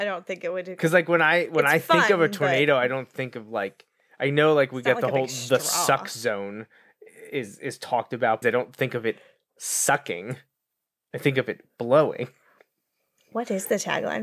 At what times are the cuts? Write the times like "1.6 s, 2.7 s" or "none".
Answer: 8.4 s